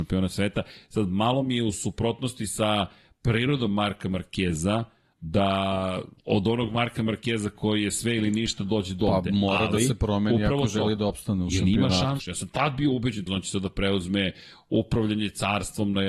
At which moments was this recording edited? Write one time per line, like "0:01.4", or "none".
0:06.2
0:12.2
0:13.3

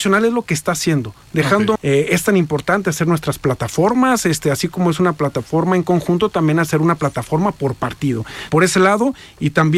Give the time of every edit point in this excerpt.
0:01.8
0:08.5

